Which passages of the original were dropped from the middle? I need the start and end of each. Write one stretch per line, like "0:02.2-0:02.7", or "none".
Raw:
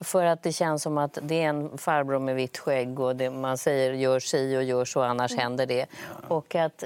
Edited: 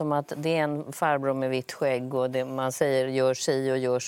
none